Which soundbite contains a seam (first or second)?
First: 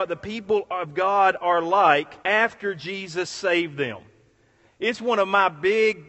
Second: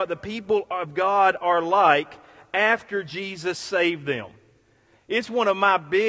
first